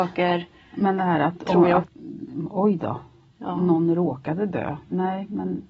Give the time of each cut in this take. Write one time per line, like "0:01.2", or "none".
0:01.8